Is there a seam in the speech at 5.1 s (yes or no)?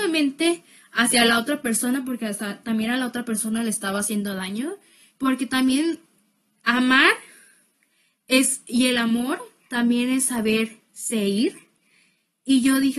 yes